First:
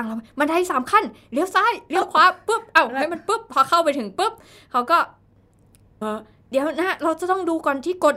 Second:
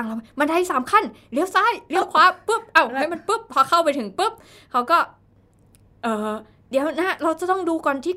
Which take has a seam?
first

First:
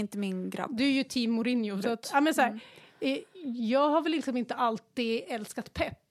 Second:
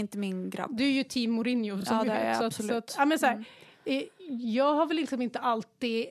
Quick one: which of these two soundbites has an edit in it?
first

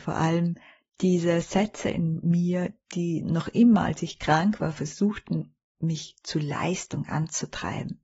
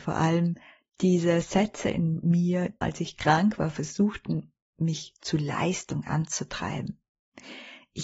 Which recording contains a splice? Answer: second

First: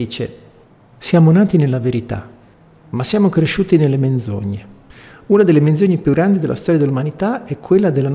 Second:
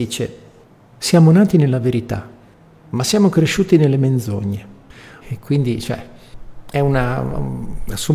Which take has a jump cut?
second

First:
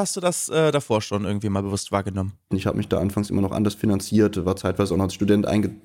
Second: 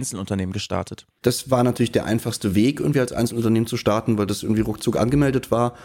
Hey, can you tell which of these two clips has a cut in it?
first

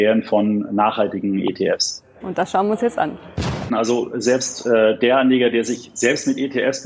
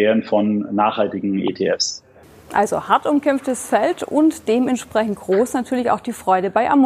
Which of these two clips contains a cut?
first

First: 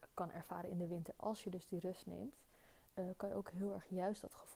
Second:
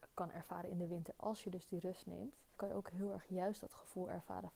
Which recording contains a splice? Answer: second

